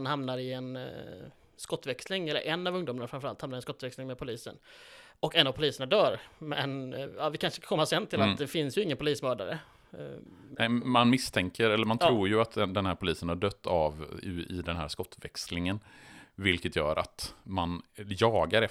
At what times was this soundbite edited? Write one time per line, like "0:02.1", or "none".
none